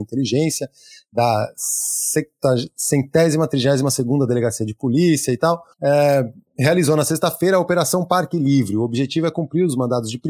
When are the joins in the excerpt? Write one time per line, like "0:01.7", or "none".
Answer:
0:05.7